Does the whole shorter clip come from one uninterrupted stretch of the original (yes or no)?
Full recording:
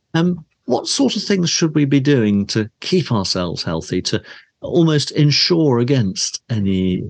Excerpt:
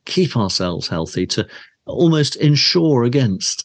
yes